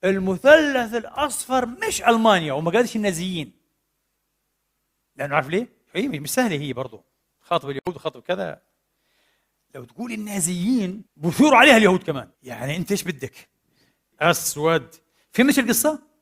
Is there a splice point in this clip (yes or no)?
yes